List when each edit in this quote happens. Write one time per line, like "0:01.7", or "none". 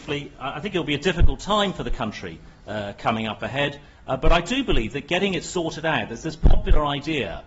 none